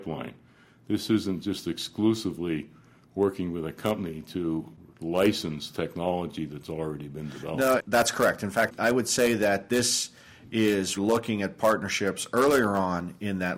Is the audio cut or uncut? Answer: cut